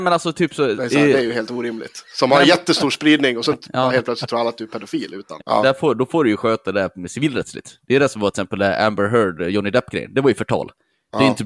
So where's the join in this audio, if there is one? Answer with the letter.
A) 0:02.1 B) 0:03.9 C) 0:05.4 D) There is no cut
C